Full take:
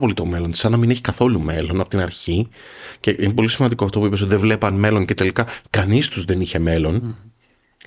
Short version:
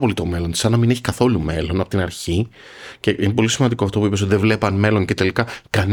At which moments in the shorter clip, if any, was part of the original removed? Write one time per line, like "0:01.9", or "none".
none